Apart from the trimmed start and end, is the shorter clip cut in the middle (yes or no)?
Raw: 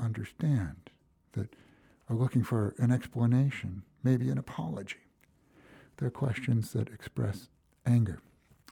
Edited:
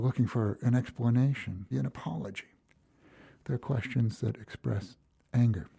yes